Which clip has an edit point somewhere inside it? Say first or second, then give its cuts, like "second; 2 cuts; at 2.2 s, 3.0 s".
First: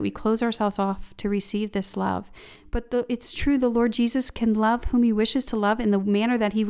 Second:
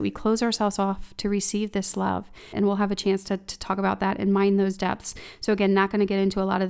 second; 1 cut; at 2.5 s